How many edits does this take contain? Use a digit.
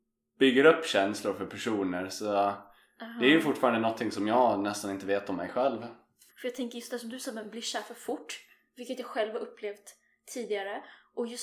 1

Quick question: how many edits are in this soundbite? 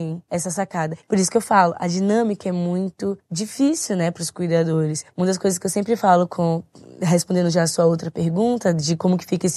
1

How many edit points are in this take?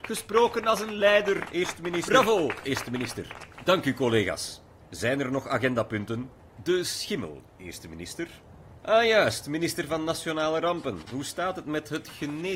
0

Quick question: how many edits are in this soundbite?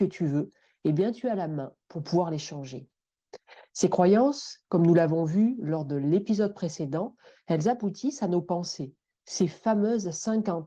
0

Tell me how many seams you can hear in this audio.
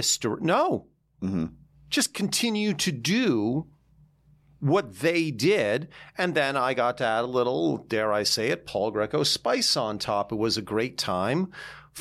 0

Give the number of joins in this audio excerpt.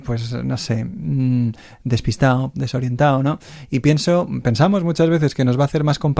1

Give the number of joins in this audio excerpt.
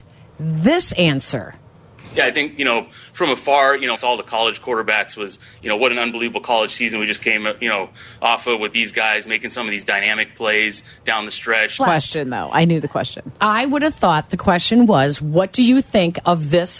2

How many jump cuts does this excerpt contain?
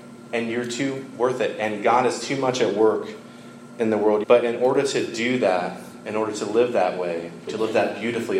2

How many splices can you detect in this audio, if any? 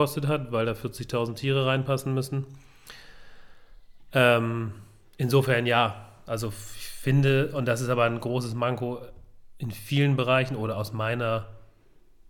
0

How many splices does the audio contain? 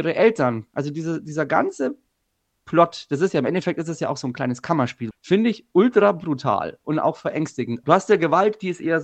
2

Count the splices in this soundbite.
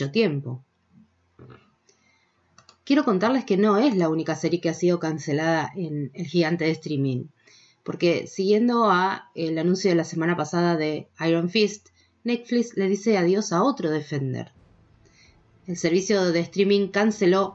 0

